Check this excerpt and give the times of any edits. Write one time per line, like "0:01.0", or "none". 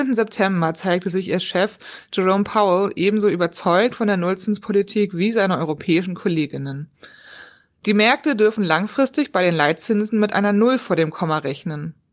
none